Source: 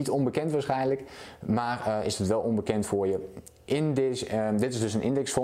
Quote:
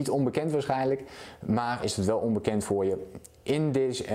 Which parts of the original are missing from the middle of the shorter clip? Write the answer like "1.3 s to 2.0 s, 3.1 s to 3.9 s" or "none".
1.8 s to 2.0 s